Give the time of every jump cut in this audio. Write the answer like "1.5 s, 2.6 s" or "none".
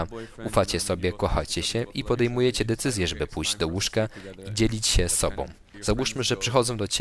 5.7 s